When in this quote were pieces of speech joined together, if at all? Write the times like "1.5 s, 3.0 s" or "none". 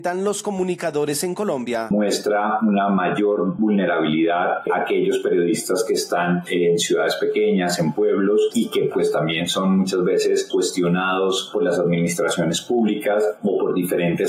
none